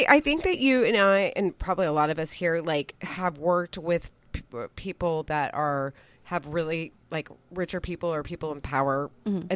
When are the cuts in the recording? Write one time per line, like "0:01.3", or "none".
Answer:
none